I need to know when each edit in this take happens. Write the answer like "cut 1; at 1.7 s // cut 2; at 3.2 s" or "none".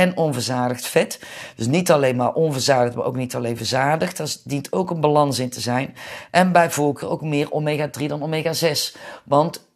none

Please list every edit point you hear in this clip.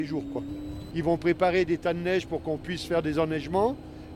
cut 1; at 0.9 s

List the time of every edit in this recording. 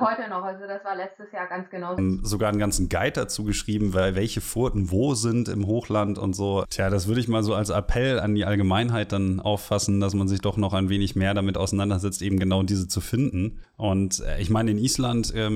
cut 1; at 2.0 s // cut 2; at 6.6 s // cut 3; at 13.6 s

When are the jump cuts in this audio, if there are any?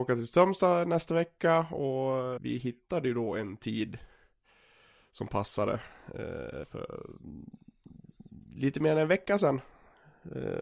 cut 1; at 2.4 s // cut 2; at 6.6 s

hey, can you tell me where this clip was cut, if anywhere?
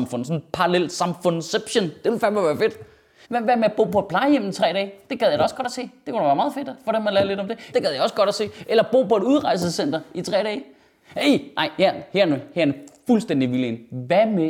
cut 1; at 3.2 s // cut 2; at 7.7 s

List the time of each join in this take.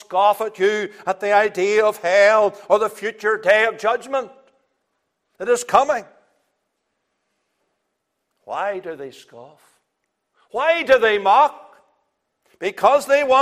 none

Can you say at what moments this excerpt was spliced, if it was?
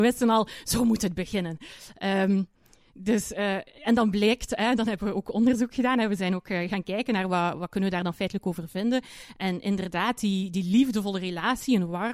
none

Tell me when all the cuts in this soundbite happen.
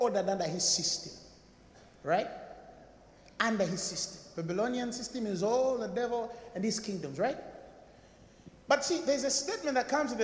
none

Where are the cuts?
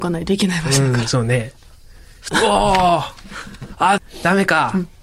cut 1; at 2.3 s // cut 2; at 4.0 s

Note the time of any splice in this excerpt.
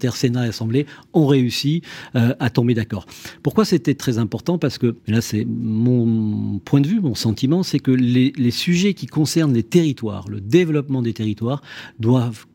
cut 1; at 5.0 s

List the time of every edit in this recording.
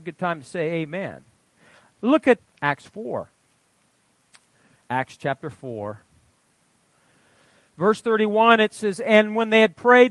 cut 1; at 2.4 s

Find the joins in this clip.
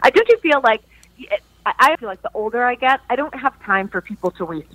cut 1; at 2.0 s

